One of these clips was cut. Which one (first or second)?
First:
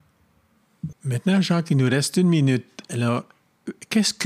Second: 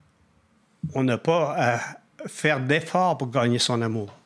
first